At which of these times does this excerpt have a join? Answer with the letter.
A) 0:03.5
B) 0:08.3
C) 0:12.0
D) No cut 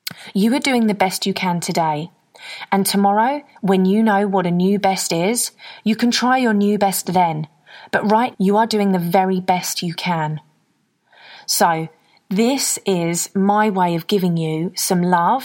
B